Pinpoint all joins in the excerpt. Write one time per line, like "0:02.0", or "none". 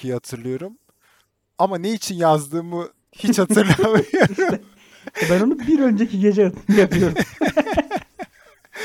none